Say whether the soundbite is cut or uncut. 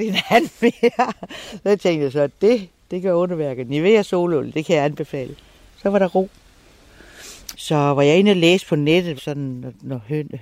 cut